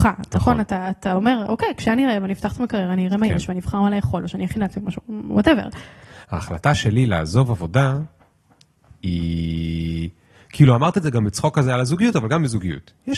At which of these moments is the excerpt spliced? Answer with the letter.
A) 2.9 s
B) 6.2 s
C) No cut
B